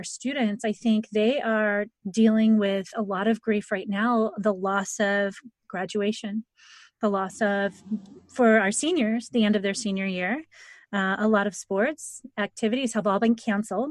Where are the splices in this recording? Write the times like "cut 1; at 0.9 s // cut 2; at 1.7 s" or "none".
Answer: none